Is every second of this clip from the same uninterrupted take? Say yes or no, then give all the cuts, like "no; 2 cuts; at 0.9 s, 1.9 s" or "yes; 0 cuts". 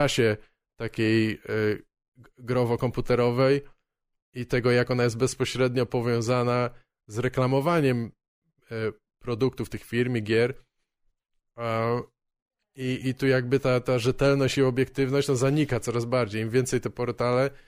yes; 0 cuts